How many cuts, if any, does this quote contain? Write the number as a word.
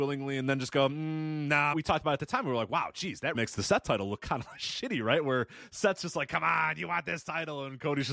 two